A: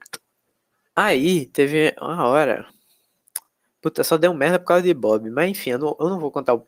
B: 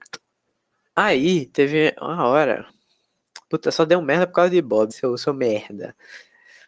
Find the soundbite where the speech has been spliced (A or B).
B